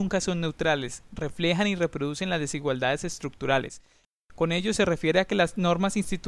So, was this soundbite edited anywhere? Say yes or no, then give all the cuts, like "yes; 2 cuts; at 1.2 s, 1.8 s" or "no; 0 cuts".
no; 0 cuts